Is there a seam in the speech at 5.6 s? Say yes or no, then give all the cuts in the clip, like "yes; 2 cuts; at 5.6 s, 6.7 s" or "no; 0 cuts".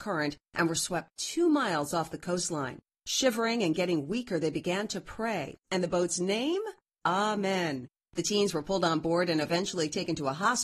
yes; 1 cut; at 5.6 s